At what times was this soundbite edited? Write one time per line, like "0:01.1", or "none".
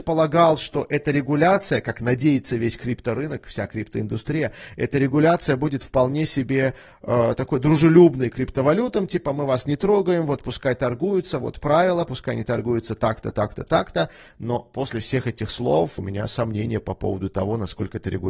0:16.0